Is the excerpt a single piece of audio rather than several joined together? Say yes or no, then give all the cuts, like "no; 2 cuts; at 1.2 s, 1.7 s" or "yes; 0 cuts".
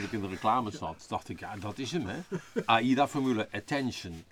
yes; 0 cuts